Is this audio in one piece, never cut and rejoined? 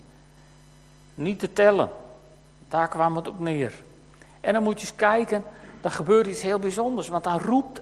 yes; 0 cuts

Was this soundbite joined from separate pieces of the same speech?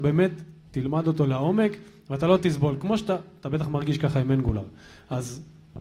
no; 0 cuts

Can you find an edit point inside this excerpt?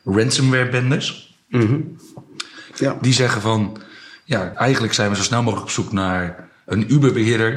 yes; 2 cuts; at 2.7 s, 4.5 s

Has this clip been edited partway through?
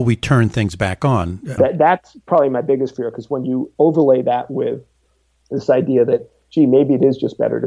yes; 1 cut; at 1.6 s

